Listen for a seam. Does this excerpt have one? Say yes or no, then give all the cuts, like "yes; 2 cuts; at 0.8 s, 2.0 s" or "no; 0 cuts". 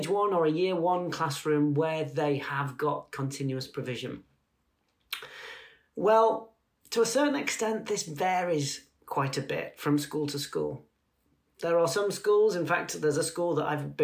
no; 0 cuts